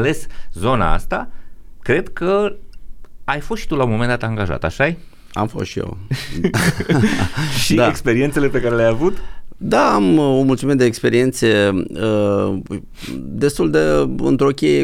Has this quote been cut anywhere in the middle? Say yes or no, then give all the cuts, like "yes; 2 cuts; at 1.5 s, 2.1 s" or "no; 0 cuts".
no; 0 cuts